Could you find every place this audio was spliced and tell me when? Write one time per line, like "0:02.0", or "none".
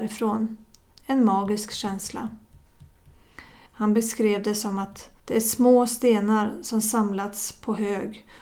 0:00.9
0:03.7
0:05.2